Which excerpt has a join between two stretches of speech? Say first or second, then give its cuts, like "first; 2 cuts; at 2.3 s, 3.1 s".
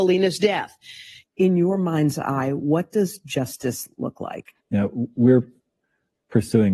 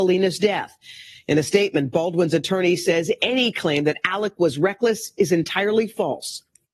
first; 2 cuts; at 1.2 s, 4.6 s